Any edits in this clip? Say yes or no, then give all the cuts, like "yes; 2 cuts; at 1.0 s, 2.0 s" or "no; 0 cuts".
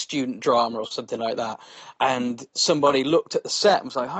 no; 0 cuts